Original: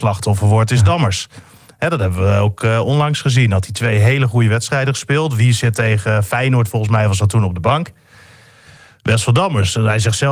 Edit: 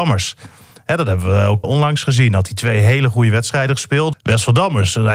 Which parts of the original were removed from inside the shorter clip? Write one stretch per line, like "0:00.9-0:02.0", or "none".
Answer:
0:02.6-0:02.8
0:05.3-0:08.9